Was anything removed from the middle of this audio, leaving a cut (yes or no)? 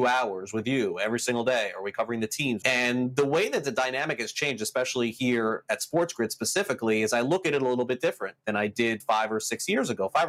yes